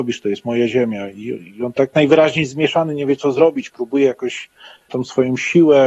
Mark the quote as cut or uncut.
uncut